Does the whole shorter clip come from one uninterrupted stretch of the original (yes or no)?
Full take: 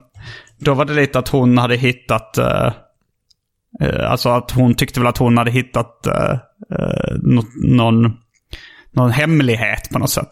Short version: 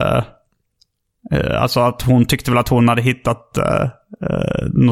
yes